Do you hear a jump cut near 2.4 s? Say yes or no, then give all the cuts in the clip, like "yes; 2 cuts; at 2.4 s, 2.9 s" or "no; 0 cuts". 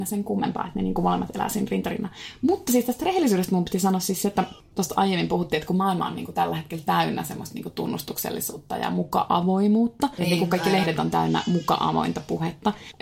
no; 1 cut; at 10.2 s